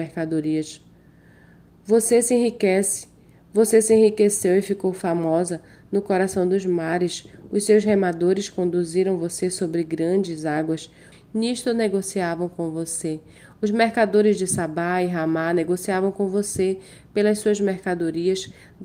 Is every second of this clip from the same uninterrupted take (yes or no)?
no